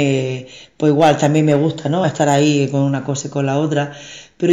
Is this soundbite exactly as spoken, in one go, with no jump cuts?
yes; 0 cuts

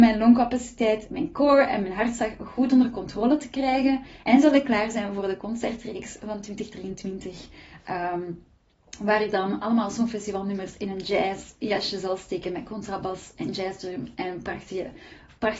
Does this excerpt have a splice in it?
yes; 1 cut; at 4.2 s

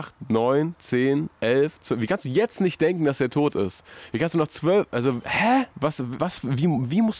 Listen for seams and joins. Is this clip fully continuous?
no; 1 cut; at 6.2 s

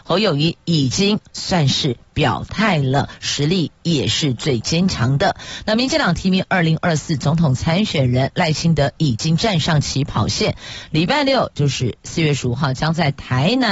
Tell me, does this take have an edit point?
no; 0 cuts

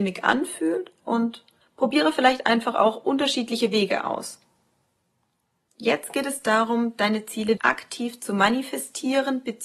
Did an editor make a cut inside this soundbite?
yes; 2 cuts; at 5.7 s, 7.6 s

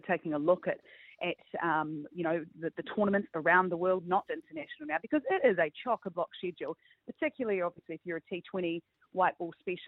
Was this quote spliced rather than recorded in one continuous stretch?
yes; 1 cut; at 4.3 s

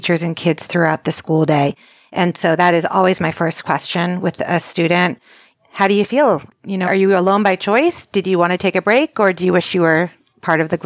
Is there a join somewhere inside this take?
yes; 1 cut; at 6.9 s

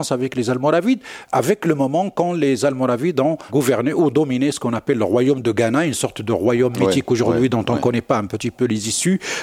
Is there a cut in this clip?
no; 0 cuts

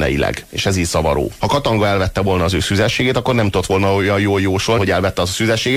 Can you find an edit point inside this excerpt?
yes; 2 cuts; at 1.4 s, 4.8 s

